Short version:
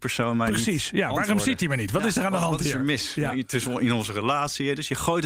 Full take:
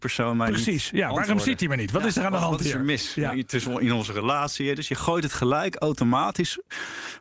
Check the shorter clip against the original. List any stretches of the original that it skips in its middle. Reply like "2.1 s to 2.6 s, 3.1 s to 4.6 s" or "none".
none